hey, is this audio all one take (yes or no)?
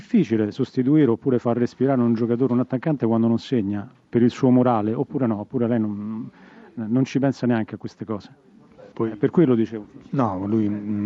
no